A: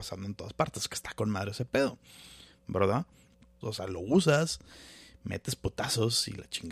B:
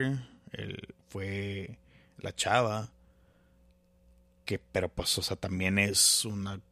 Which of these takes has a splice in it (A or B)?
A